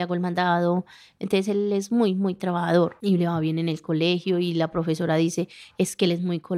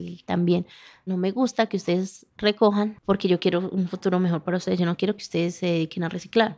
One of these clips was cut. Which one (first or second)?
second